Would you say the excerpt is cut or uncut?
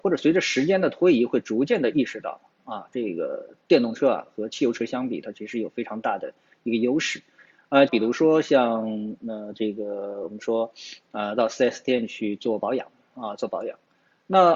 cut